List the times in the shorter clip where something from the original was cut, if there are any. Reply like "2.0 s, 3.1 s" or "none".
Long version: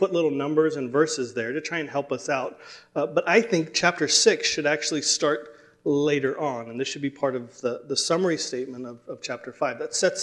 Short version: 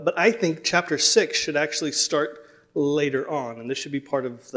none